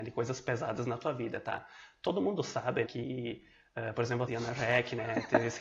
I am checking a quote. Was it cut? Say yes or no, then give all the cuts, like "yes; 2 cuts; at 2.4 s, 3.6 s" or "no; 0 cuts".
yes; 2 cuts; at 2.8 s, 4.3 s